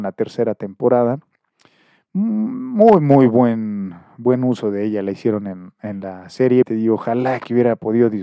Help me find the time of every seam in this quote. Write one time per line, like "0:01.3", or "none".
0:06.6